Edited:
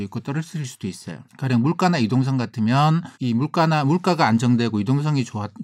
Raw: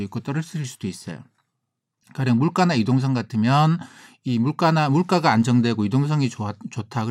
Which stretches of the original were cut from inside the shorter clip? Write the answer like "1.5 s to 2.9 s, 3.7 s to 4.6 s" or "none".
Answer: 1.3 s to 2.0 s, 3.9 s to 4.2 s